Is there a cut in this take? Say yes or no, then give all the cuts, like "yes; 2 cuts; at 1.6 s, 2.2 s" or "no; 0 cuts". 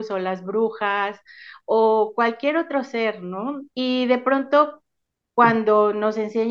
yes; 1 cut; at 3.7 s